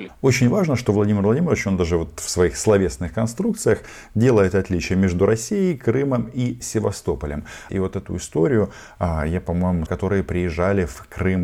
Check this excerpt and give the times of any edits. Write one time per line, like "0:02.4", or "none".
0:07.7
0:09.9